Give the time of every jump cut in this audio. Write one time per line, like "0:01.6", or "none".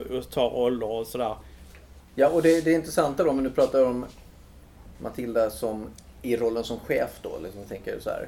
0:02.0